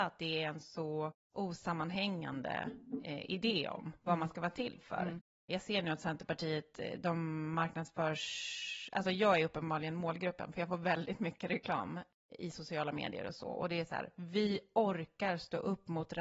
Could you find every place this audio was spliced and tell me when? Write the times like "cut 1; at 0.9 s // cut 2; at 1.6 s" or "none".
none